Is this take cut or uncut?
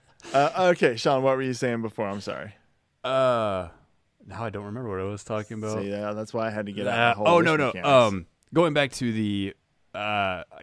uncut